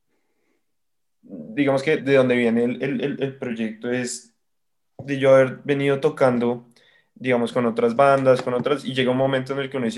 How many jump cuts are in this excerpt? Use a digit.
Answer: 2